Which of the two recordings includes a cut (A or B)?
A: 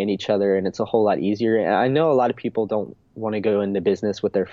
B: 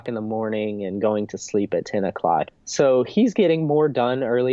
B